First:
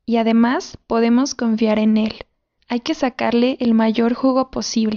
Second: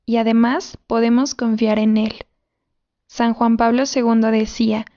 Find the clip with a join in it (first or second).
first